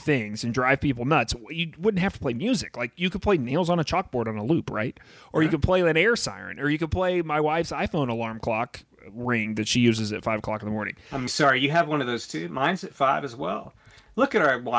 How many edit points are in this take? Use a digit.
1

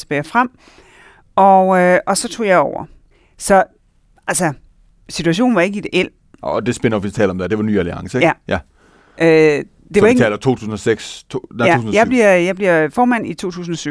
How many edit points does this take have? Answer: 0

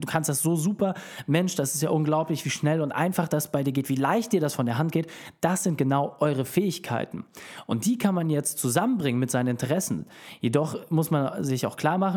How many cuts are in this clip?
0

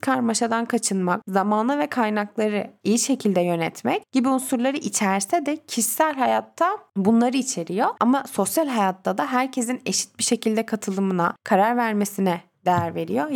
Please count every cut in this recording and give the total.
1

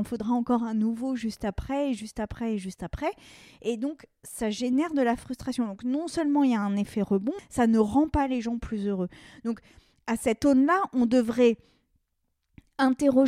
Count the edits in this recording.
1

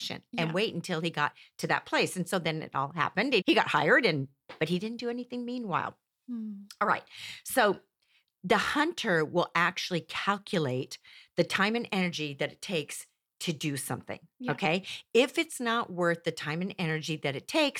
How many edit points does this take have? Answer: 1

